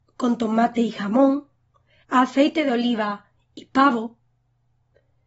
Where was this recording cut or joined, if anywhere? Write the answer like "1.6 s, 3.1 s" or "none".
2.0 s